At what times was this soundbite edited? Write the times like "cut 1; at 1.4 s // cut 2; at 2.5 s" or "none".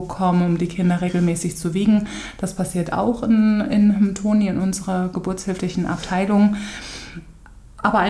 none

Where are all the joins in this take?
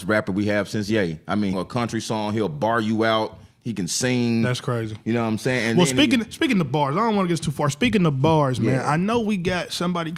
cut 1; at 1.5 s

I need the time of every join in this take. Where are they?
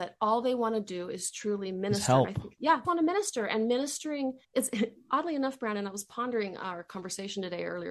cut 1; at 2.8 s // cut 2; at 4.4 s

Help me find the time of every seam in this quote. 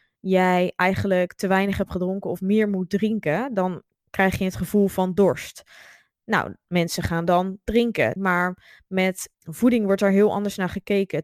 cut 1; at 8.2 s // cut 2; at 9.3 s

